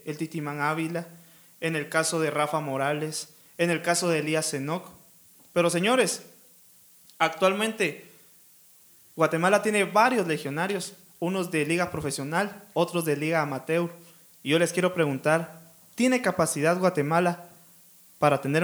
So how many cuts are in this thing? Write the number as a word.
zero